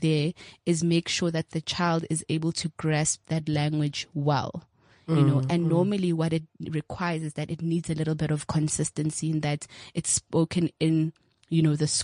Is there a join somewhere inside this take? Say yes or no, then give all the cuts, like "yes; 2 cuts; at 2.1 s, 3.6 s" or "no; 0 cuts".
no; 0 cuts